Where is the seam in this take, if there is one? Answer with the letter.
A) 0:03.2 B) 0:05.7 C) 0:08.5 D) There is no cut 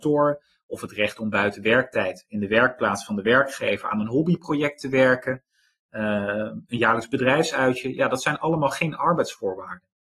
D